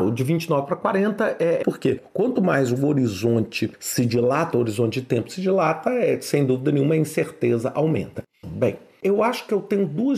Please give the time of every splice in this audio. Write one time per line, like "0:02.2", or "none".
0:01.6
0:08.4